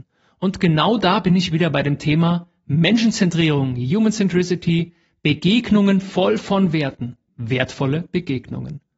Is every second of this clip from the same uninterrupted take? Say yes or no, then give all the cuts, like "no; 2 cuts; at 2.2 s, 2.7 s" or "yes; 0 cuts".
no; 1 cut; at 7.3 s